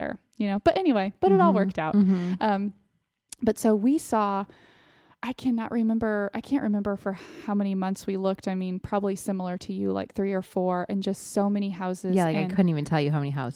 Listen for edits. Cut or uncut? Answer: uncut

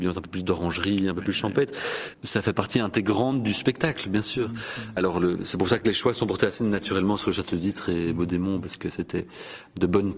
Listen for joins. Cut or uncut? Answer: cut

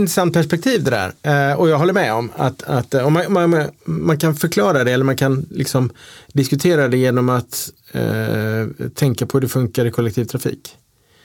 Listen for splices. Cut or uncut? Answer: uncut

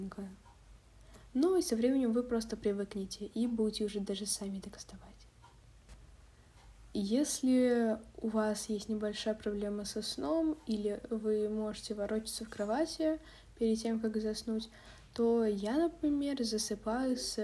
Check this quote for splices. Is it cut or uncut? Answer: uncut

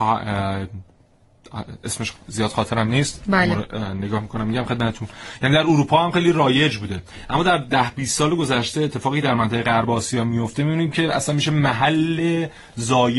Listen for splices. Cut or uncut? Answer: uncut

